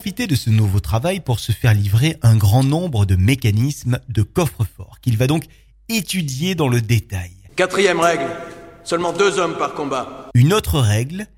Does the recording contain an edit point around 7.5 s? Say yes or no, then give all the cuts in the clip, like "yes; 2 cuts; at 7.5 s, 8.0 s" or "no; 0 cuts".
yes; 1 cut; at 7.5 s